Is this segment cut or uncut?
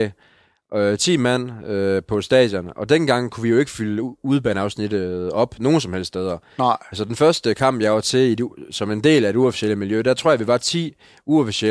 uncut